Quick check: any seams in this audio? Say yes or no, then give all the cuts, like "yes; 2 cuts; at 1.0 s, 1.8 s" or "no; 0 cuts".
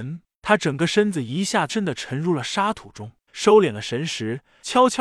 yes; 2 cuts; at 1.7 s, 3.3 s